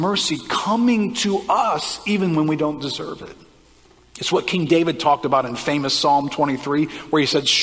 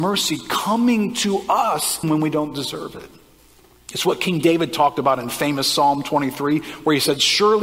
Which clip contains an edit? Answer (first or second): second